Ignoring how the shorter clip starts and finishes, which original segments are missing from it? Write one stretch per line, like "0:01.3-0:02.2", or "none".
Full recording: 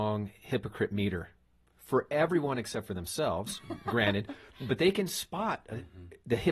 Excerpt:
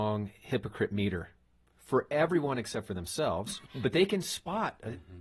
0:03.7-0:04.5